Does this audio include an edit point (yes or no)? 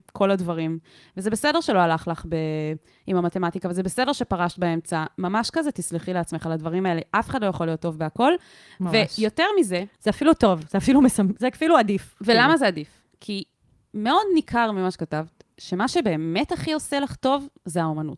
no